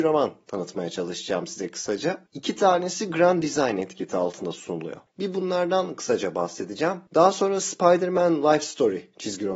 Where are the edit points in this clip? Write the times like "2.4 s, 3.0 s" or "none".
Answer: 5.1 s